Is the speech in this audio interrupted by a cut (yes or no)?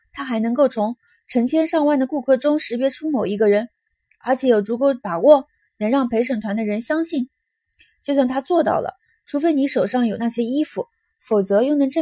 no